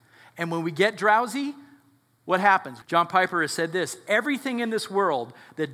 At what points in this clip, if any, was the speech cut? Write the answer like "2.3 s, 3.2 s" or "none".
2.8 s